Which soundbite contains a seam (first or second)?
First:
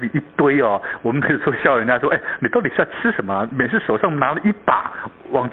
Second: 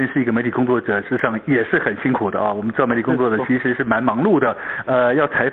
first